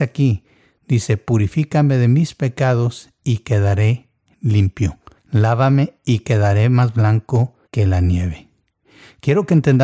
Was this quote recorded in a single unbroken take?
no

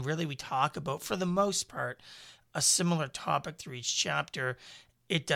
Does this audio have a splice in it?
no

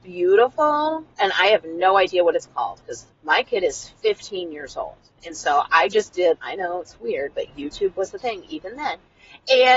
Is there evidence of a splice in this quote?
yes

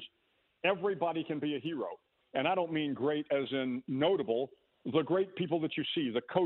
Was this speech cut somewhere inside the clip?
yes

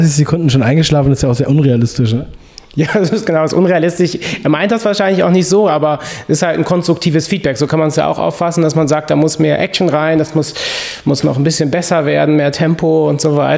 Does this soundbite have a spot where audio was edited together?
no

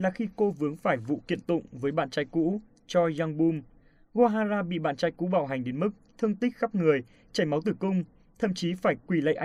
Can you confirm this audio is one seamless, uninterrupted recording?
yes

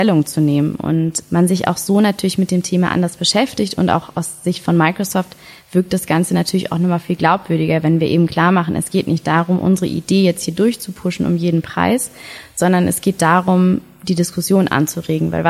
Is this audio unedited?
yes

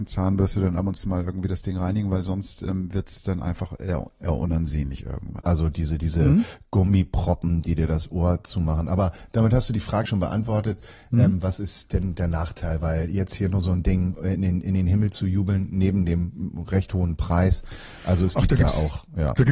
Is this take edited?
yes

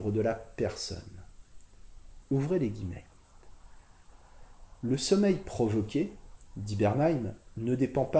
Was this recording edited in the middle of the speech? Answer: no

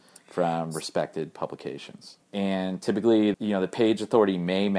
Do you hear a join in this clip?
yes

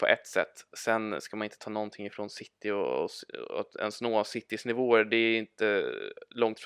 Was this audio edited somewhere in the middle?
no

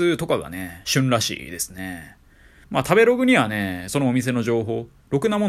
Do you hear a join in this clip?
yes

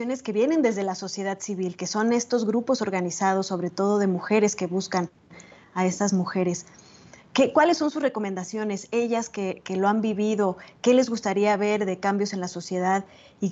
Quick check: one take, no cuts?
yes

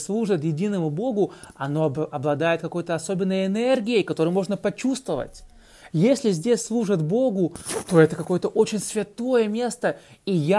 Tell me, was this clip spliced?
yes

